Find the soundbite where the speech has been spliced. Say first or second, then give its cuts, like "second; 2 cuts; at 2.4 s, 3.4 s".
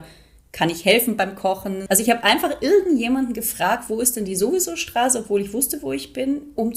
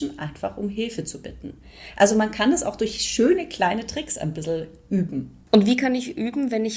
first; 1 cut; at 1.9 s